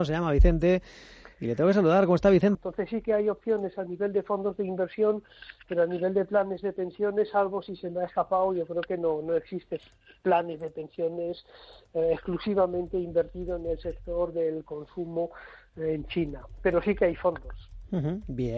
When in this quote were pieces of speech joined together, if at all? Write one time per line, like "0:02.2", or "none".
0:02.5